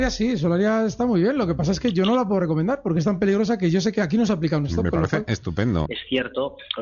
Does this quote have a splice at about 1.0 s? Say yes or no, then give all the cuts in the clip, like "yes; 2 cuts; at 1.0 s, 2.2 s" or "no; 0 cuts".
no; 1 cut; at 5.9 s